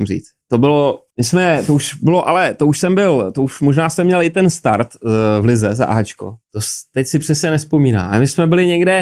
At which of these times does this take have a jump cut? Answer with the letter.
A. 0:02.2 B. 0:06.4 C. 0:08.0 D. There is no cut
B